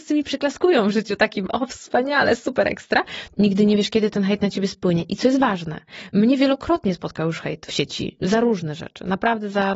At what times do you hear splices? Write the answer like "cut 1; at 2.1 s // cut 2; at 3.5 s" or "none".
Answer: cut 1; at 3.3 s // cut 2; at 7.7 s